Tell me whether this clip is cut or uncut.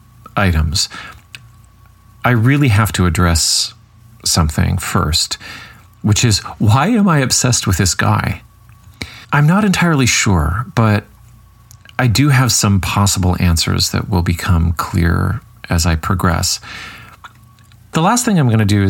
cut